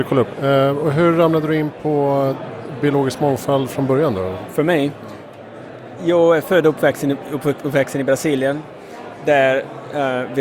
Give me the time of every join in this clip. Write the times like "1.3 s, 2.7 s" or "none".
4.5 s